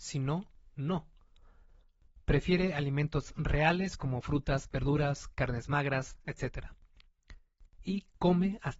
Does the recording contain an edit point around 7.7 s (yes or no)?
yes